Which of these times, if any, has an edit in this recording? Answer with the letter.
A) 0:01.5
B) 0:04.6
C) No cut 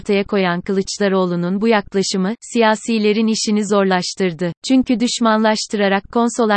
B